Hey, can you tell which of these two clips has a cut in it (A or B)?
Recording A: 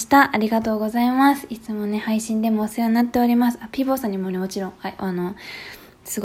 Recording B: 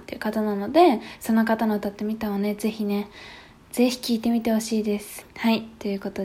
B